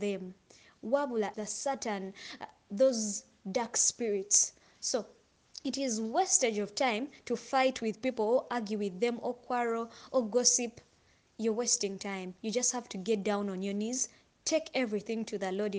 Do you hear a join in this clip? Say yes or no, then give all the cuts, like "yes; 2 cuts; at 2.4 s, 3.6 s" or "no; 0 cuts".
yes; 1 cut; at 1.3 s